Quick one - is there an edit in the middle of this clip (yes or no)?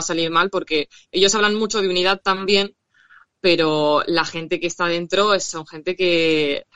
no